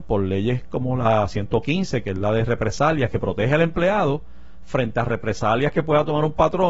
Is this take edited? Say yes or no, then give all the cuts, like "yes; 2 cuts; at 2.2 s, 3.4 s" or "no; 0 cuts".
no; 0 cuts